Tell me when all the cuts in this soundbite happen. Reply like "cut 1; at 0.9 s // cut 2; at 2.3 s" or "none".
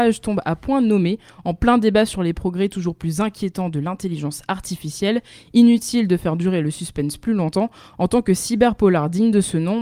none